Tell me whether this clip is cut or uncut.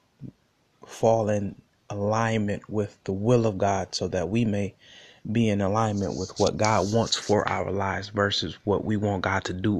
uncut